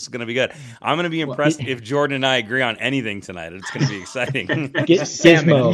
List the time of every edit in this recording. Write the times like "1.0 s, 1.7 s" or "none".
1.6 s